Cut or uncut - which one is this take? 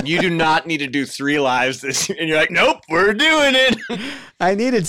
uncut